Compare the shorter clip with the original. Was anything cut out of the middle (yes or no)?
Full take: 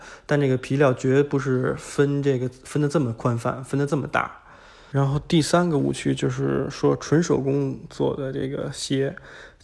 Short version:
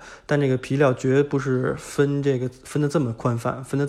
no